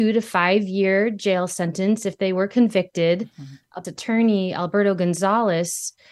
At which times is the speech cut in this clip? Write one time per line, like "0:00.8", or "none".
0:03.8